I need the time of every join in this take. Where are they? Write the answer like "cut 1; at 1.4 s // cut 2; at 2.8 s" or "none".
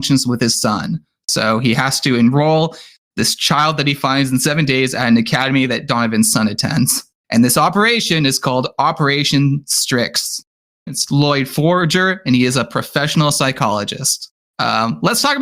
cut 1; at 10.9 s